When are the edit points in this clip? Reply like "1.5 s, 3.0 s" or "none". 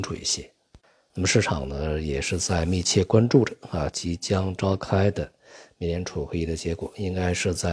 1.1 s